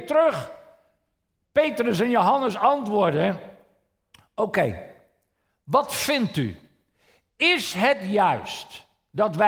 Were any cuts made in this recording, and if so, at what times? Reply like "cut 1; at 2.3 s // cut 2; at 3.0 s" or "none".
none

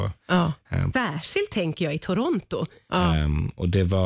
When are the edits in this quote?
cut 1; at 0.9 s // cut 2; at 2.9 s

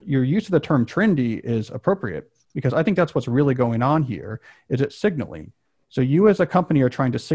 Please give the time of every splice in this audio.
none

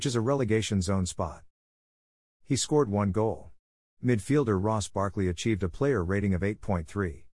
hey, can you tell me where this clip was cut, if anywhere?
cut 1; at 2.3 s

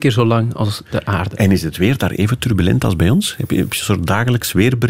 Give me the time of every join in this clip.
none

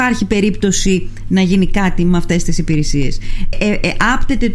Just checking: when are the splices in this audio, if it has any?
cut 1; at 3.5 s

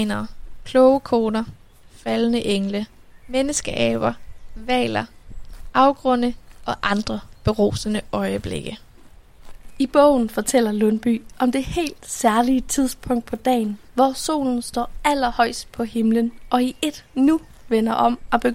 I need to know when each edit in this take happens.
none

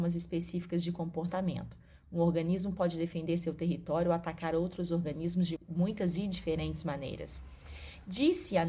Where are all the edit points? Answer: cut 1; at 5.6 s

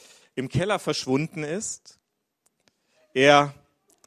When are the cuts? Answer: none

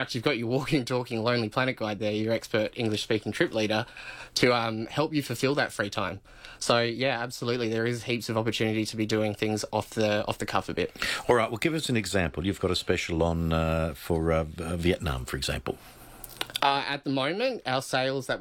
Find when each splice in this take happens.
none

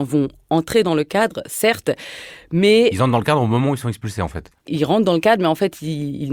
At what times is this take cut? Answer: cut 1; at 4.6 s

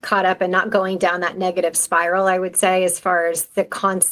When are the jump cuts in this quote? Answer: none

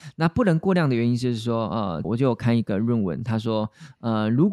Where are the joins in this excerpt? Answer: cut 1; at 2.0 s

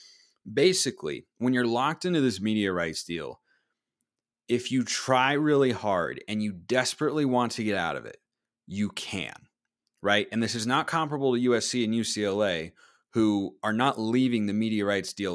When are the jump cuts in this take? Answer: none

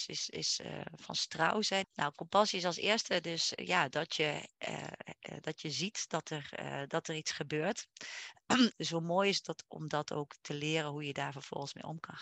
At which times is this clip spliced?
cut 1; at 1.8 s // cut 2; at 8.7 s

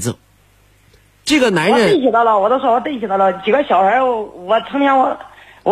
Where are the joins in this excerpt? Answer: none

